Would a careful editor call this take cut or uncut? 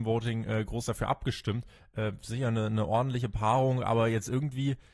uncut